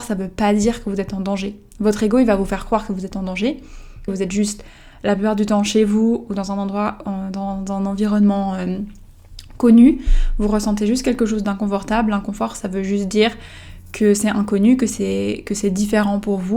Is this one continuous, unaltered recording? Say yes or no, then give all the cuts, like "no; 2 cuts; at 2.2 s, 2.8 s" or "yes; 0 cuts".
no; 1 cut; at 4.1 s